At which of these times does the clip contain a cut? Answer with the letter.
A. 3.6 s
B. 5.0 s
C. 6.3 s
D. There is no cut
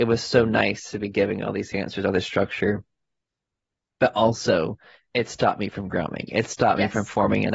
D